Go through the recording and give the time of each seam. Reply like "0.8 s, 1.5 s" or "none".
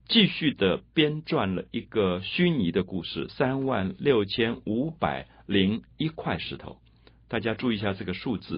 3.3 s